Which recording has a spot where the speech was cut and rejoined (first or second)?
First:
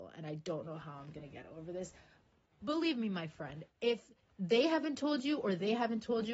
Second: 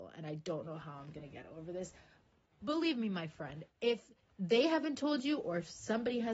second